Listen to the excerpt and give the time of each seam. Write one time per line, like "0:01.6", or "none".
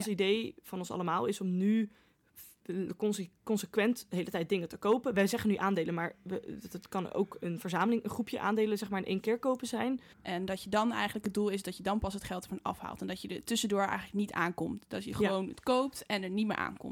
0:10.1